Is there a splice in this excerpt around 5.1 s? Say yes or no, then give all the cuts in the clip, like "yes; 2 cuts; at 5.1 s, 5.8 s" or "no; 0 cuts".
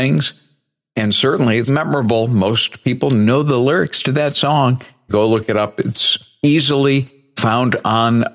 yes; 2 cuts; at 1.7 s, 5.1 s